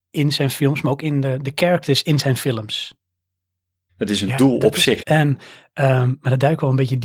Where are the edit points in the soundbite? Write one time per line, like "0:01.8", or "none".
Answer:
0:03.9
0:05.0